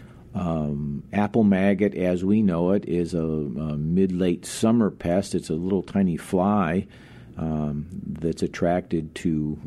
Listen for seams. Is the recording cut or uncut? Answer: uncut